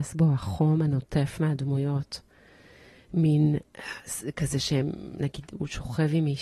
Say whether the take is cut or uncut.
uncut